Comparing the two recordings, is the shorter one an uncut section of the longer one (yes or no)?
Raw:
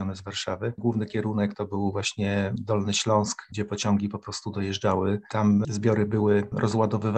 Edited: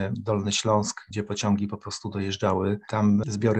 yes